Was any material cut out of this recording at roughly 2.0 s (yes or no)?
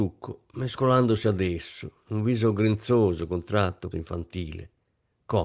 yes